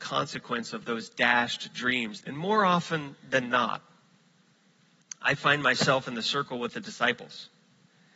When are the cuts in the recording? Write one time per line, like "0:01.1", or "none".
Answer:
0:02.2